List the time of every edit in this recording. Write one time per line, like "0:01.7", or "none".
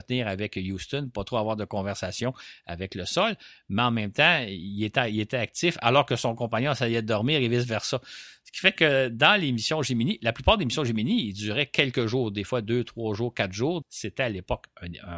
0:13.8